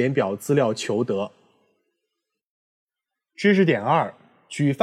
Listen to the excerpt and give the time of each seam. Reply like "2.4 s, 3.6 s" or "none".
none